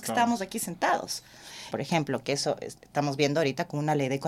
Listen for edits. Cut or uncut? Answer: cut